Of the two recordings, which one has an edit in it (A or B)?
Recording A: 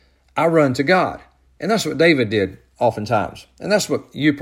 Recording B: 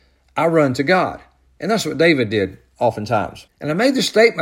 B